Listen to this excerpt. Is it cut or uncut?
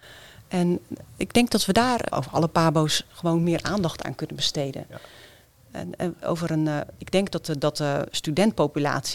cut